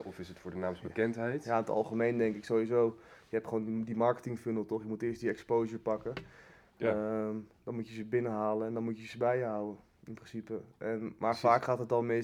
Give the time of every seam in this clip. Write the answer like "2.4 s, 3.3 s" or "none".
none